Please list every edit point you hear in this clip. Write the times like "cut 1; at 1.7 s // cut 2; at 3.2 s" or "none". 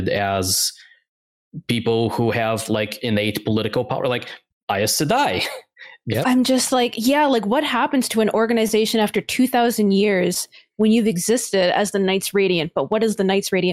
cut 1; at 6.2 s